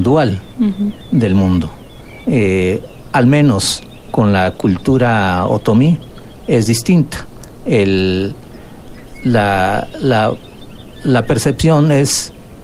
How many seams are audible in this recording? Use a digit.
1